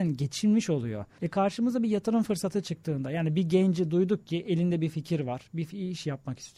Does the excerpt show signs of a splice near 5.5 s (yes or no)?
no